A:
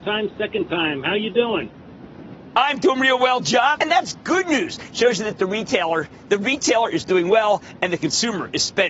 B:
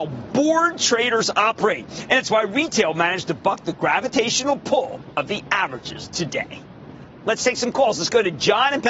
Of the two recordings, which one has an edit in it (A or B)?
A